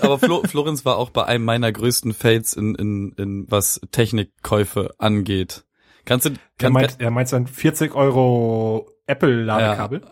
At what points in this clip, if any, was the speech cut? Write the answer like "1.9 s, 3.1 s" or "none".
3.5 s